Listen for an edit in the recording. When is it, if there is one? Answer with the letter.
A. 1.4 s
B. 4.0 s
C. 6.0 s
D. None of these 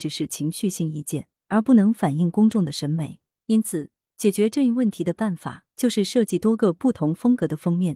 A